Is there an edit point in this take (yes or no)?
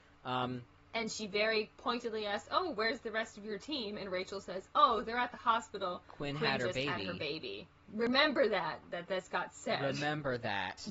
no